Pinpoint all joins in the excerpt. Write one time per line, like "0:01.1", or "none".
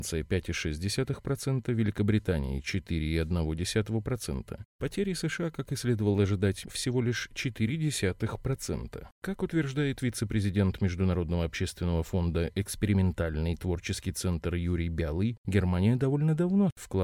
0:06.6